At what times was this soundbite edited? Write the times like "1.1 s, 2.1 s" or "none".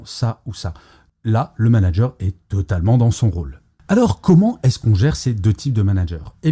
none